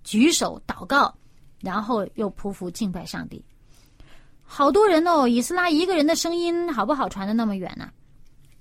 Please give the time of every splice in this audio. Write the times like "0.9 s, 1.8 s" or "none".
4.4 s